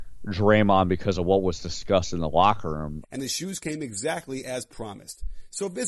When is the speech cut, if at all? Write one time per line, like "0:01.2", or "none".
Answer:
0:03.0